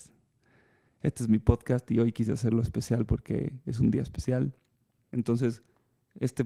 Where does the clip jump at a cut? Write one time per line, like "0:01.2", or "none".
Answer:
0:05.0